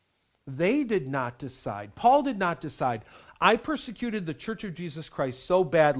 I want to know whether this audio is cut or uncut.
uncut